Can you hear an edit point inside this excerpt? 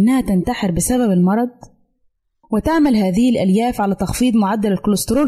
yes; 1 cut; at 2.4 s

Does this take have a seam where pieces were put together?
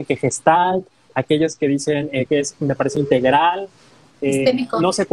yes; 1 cut; at 2.3 s

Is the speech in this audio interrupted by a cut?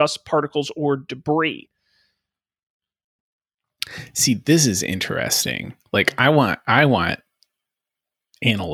no; 0 cuts

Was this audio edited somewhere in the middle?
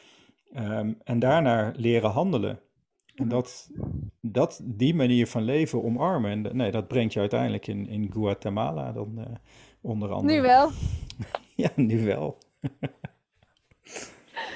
no; 0 cuts

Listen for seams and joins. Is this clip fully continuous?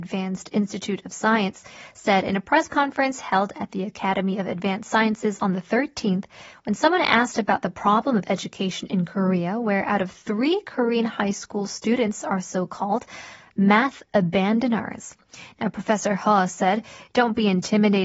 yes; 0 cuts

